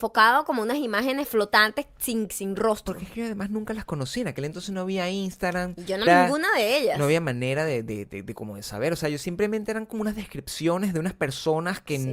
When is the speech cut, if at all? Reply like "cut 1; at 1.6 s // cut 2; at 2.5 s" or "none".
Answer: cut 1; at 6.1 s